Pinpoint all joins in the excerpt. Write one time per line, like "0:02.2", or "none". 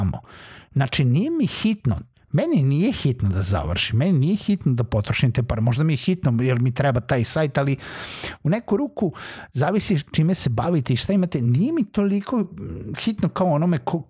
0:02.1